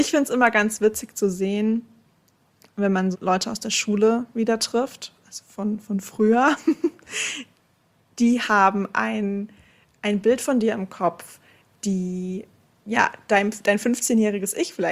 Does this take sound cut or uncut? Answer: cut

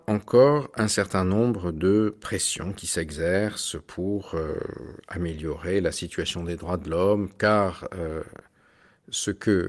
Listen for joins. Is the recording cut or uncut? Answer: uncut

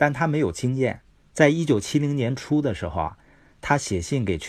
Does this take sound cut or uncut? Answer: cut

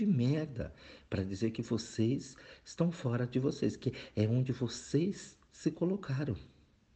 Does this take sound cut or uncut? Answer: uncut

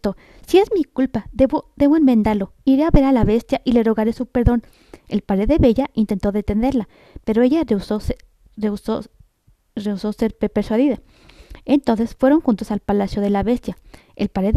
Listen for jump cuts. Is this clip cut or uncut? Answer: uncut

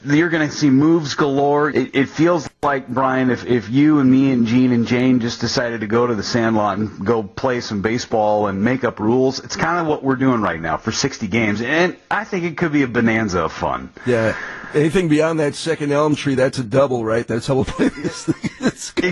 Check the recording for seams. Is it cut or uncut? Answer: cut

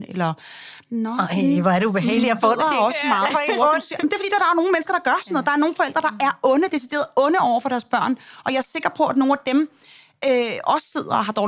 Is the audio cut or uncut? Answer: uncut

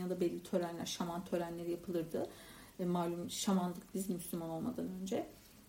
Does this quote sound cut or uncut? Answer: uncut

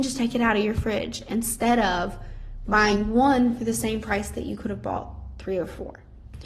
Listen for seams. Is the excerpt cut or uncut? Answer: uncut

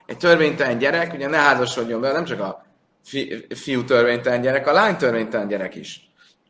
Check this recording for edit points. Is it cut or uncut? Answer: uncut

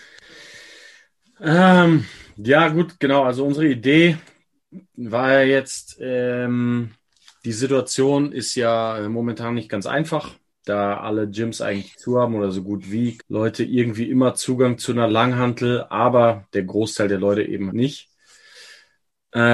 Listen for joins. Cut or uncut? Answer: cut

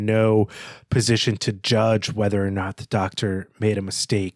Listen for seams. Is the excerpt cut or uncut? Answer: uncut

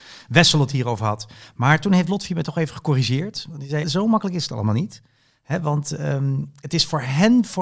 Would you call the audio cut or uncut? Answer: cut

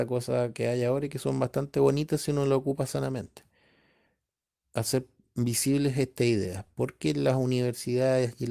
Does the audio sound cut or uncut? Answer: uncut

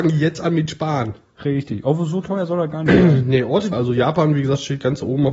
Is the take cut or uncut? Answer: cut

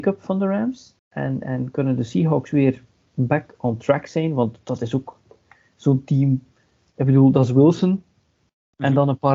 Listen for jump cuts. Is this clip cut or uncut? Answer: cut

